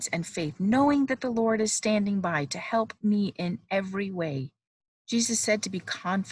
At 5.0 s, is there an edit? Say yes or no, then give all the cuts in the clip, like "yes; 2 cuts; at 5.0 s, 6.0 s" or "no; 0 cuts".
yes; 1 cut; at 5.0 s